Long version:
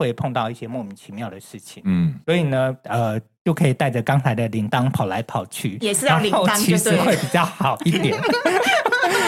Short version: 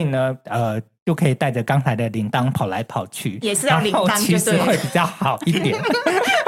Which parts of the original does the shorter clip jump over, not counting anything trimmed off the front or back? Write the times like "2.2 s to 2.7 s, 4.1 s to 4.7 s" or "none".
none

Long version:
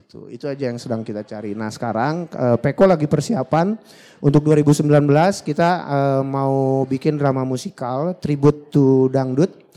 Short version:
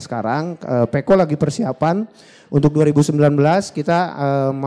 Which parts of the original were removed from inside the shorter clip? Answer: none

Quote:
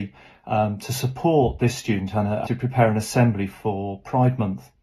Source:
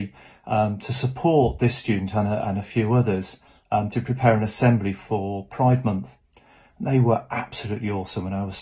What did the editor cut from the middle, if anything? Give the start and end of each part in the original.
2.5 s to 3.9 s

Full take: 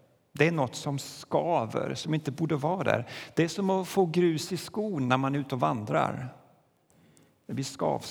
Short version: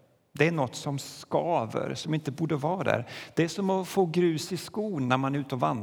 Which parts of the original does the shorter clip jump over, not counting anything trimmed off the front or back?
none

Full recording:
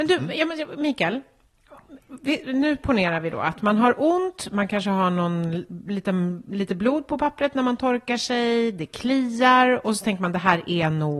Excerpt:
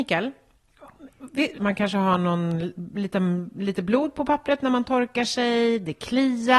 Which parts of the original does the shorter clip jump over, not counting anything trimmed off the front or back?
2.5 s to 4.5 s

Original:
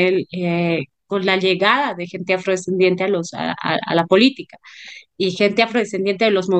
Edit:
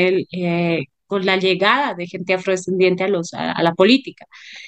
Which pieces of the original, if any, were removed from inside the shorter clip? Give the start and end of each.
3.5 s to 3.9 s

